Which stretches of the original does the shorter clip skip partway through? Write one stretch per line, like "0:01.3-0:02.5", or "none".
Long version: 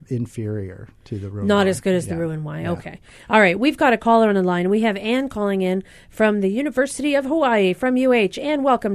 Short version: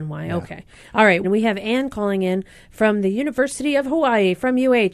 0:03.6-0:04.6